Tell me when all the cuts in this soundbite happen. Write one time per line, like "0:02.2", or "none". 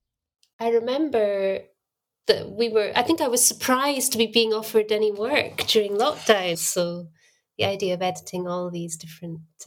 0:02.2
0:06.5